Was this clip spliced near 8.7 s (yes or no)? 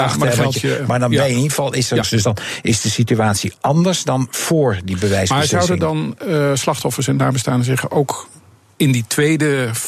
no